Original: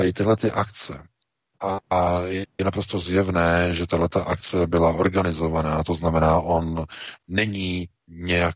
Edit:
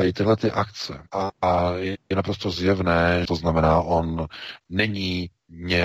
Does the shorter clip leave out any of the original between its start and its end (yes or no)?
yes